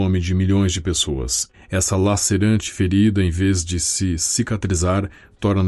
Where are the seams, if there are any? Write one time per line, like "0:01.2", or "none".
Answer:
none